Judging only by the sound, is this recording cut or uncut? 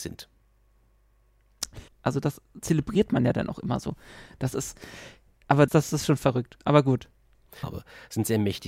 cut